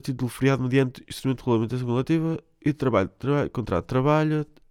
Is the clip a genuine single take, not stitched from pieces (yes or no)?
yes